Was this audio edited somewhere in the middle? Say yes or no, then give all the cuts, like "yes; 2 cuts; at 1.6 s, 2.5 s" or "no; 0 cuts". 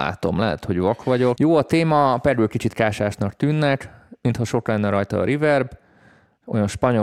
yes; 1 cut; at 1.4 s